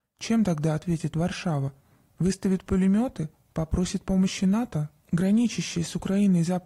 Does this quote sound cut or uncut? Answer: cut